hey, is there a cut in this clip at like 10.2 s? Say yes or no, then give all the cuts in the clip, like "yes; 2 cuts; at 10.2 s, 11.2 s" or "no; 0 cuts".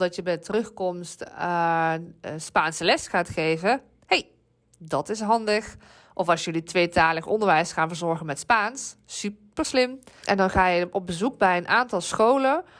yes; 1 cut; at 10.2 s